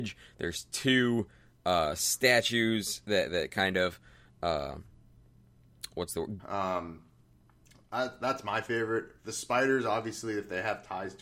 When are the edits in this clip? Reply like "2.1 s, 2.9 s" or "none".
6.4 s